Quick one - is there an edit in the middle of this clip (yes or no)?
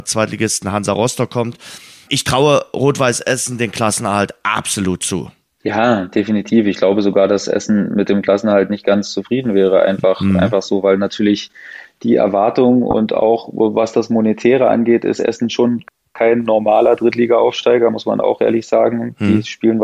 no